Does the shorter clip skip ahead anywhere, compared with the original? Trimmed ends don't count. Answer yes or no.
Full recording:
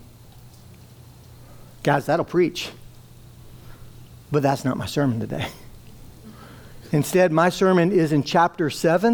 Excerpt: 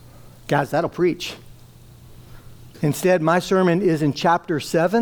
yes